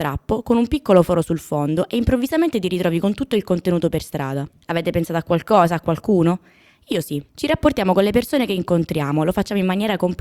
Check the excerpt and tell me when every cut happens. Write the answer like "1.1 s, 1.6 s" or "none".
none

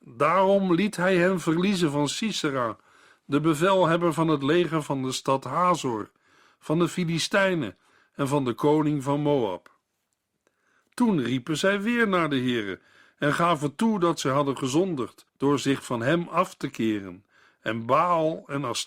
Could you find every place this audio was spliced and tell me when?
15.3 s

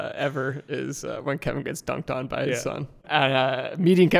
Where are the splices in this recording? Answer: 3.0 s

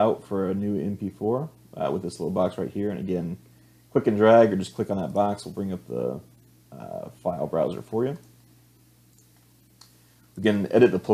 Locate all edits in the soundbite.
none

